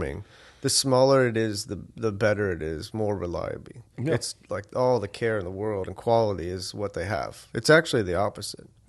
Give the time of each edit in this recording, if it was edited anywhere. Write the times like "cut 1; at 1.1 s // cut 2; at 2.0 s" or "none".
cut 1; at 4.4 s // cut 2; at 7.5 s